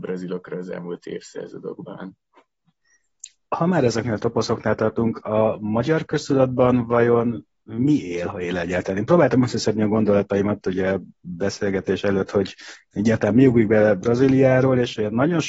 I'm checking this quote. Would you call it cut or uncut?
uncut